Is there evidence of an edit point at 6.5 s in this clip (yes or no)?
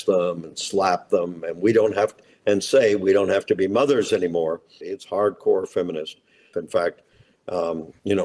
yes